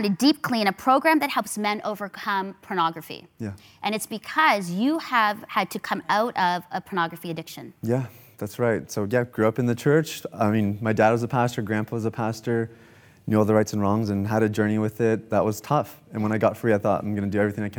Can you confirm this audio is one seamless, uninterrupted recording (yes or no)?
yes